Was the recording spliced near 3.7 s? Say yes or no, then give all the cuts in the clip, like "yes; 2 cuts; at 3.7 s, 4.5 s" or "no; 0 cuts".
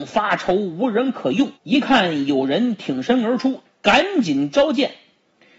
yes; 2 cuts; at 1.6 s, 3.7 s